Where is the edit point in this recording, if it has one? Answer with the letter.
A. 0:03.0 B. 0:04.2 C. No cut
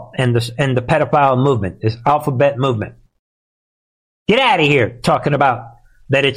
C